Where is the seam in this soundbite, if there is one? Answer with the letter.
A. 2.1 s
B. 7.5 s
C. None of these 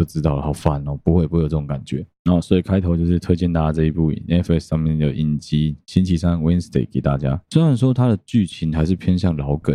B